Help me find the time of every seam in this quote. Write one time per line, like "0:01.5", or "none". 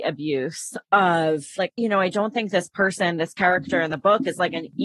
0:01.6